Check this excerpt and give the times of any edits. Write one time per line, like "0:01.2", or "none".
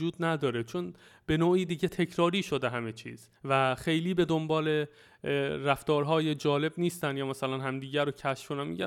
0:03.4